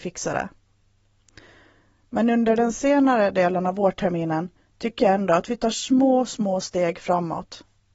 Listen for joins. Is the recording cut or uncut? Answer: uncut